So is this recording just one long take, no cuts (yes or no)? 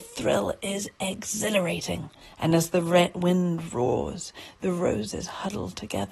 no